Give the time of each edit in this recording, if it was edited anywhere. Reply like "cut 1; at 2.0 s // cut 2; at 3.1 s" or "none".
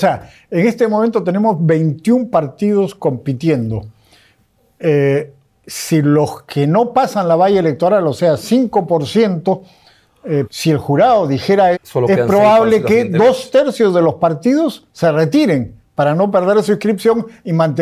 cut 1; at 10.4 s // cut 2; at 11.7 s